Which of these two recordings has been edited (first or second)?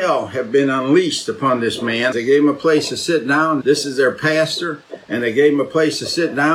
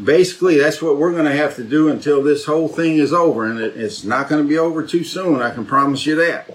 first